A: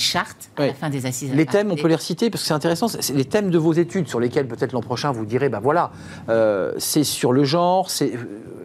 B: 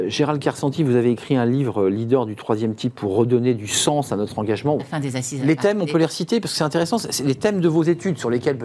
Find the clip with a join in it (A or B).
B